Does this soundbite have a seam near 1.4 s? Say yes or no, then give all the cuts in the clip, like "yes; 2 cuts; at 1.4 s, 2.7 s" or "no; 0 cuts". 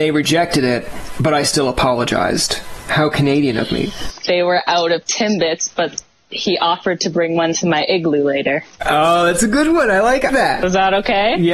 no; 2 cuts; at 4.2 s, 10.3 s